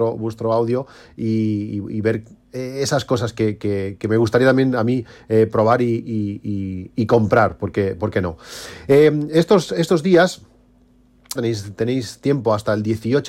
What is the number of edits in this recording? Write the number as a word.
one